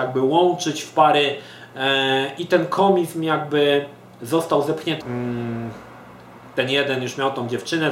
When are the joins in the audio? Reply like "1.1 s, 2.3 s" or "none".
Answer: 5.0 s